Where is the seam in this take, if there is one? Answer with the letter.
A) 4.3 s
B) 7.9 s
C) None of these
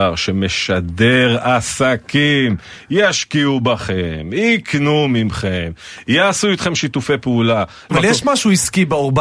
B